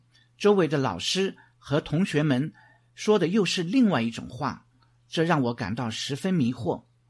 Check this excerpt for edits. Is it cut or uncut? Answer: uncut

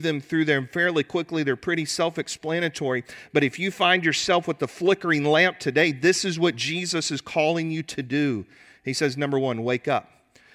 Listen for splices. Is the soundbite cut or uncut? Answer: uncut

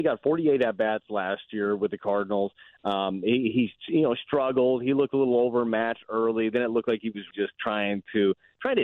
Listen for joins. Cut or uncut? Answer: cut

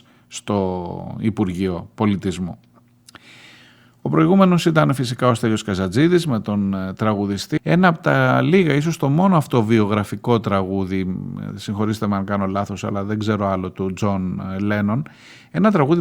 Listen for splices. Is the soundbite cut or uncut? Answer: cut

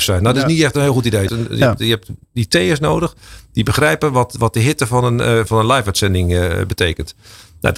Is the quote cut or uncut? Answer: cut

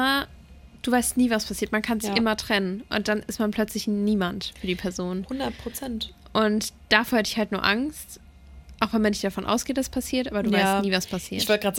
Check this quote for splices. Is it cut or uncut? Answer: uncut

